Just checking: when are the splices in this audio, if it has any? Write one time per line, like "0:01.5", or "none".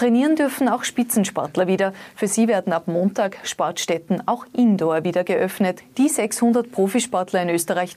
none